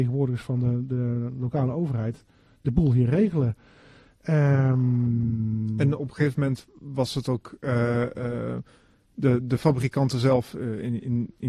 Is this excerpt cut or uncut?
uncut